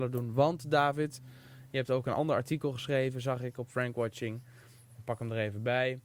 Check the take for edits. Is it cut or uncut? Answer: uncut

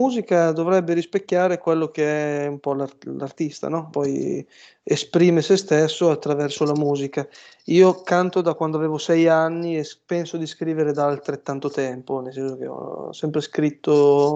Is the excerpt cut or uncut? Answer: cut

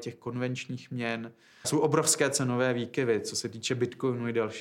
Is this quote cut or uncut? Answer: cut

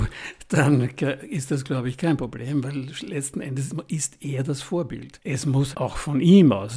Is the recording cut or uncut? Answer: cut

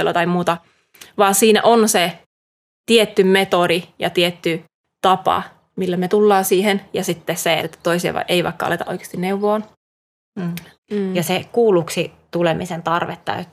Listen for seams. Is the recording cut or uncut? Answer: cut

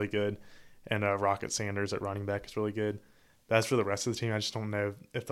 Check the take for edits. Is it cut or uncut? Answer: uncut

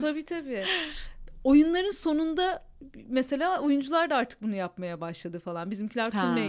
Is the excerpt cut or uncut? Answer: uncut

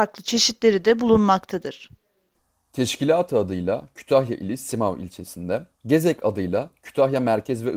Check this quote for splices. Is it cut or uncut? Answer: uncut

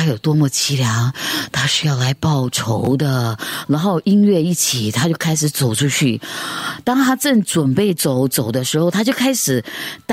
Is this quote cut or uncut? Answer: cut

